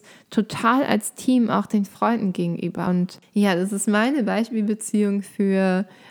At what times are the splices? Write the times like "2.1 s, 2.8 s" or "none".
2.9 s